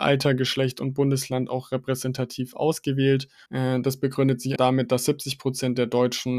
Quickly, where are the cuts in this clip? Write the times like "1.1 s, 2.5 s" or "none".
3.5 s, 4.6 s